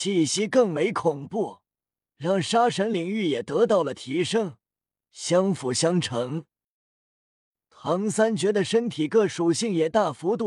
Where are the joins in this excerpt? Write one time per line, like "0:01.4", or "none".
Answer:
none

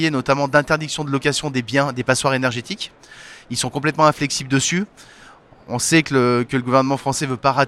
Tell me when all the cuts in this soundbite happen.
none

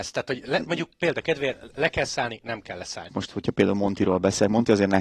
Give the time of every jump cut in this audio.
0:03.1

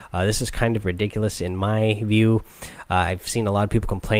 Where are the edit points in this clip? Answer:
none

